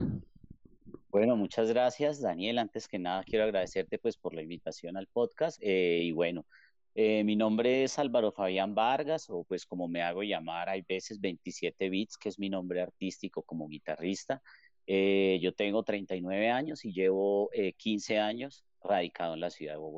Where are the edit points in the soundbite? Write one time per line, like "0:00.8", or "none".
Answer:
none